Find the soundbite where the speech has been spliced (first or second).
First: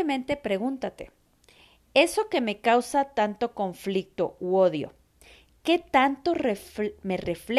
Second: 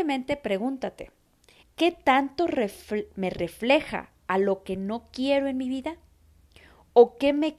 second